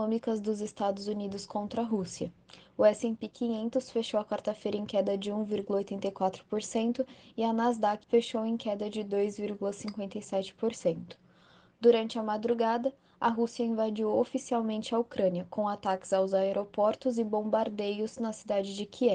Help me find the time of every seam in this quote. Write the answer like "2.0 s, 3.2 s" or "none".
8.0 s